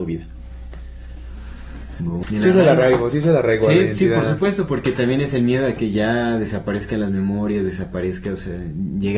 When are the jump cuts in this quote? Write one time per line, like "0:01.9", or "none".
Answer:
0:02.2